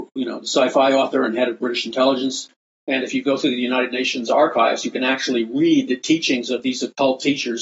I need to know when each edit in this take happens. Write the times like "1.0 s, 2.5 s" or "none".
2.8 s